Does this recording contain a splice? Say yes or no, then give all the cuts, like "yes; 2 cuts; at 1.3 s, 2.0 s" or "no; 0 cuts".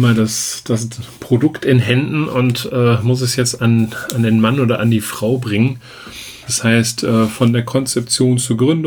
yes; 1 cut; at 6.5 s